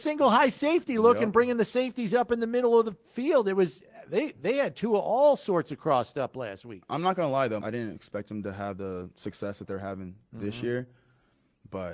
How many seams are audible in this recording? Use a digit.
1